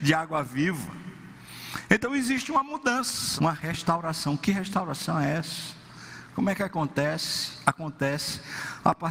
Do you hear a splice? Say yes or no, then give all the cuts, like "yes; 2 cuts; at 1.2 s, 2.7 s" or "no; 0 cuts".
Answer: yes; 1 cut; at 3.4 s